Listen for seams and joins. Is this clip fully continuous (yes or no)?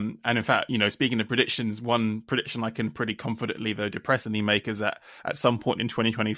yes